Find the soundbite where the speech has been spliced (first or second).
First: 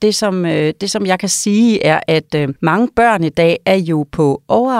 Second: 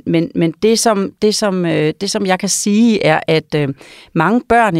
first